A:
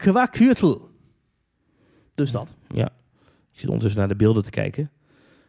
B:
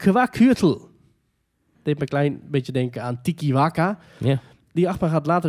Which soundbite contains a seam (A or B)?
B